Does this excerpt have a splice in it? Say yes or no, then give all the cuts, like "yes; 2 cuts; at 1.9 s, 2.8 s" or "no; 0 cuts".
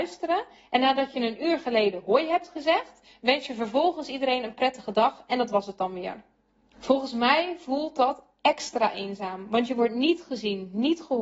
yes; 1 cut; at 6.7 s